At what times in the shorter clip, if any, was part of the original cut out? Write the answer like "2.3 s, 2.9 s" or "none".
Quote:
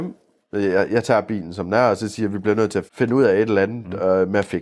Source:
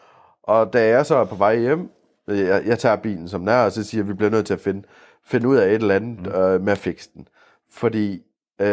2.9 s